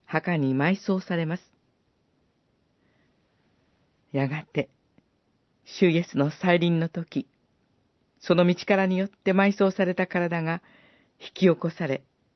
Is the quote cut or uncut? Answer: uncut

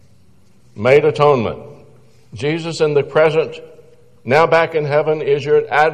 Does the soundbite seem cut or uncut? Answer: uncut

